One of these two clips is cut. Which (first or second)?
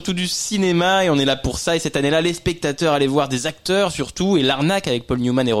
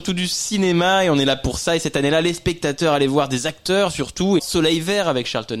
second